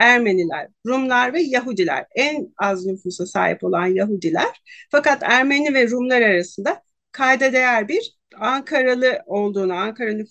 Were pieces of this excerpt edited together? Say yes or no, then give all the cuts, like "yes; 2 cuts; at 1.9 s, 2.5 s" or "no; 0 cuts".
no; 0 cuts